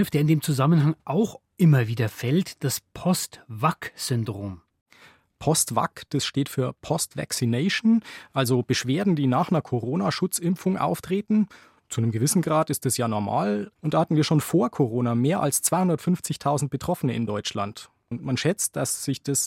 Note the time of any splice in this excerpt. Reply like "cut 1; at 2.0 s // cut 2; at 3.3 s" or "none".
cut 1; at 13.8 s // cut 2; at 18.1 s